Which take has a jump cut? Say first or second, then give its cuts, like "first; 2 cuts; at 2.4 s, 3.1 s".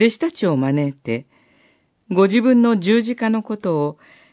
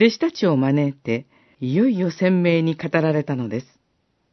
second; 1 cut; at 1.5 s